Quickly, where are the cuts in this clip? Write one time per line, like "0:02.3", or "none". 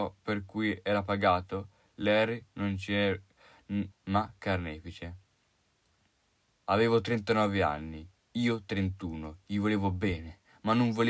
0:03.9
0:06.6

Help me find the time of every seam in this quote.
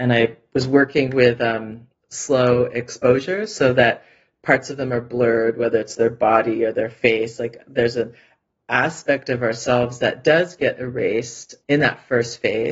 none

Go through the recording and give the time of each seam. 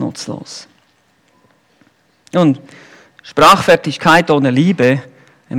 none

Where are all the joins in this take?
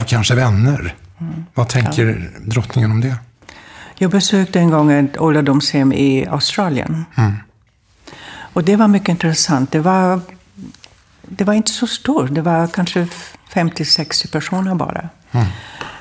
none

